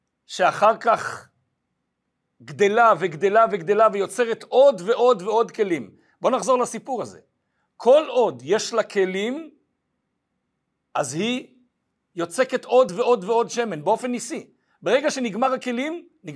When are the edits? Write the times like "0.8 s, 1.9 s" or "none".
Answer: none

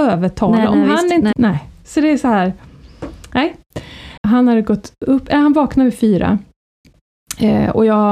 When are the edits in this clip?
1.3 s, 4.2 s

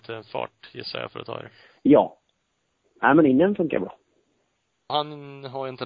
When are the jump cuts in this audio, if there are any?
2.8 s, 4.9 s

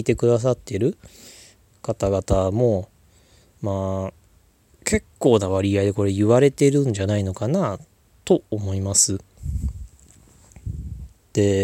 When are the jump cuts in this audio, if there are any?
none

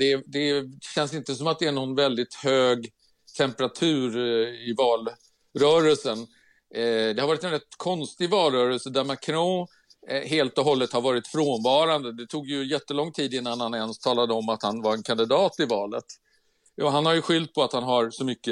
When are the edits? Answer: none

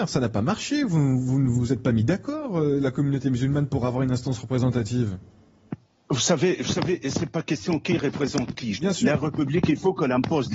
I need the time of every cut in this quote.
1.5 s, 8.7 s

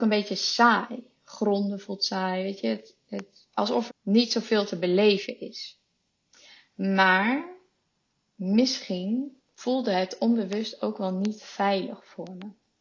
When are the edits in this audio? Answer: 3.9 s

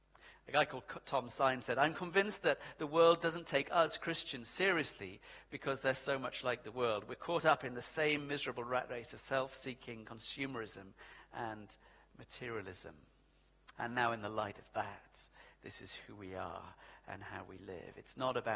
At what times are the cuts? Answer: 13.7 s

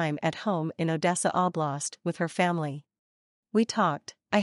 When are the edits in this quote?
3.4 s

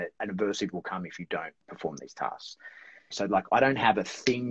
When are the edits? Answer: 3.1 s

